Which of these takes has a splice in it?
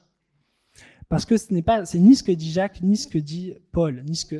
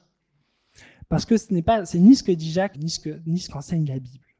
second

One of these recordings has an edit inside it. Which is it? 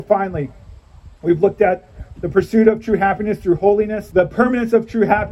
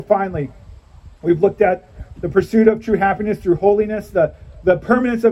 first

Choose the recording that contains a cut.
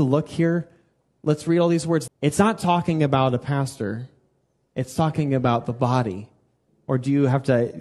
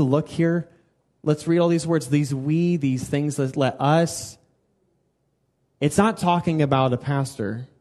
first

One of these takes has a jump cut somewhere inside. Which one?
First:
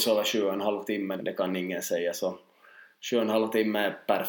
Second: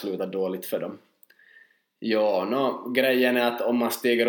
first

